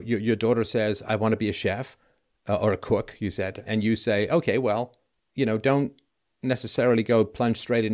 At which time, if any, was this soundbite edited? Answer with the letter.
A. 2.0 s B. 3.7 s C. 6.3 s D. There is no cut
B